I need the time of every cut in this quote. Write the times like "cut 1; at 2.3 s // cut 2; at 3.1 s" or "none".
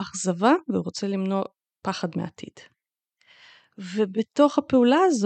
none